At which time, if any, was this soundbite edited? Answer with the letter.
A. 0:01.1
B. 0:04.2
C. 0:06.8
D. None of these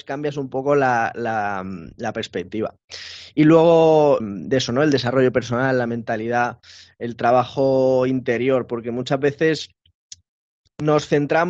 B